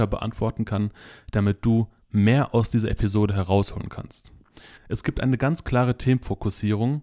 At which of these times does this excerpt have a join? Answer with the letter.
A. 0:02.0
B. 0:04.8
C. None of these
B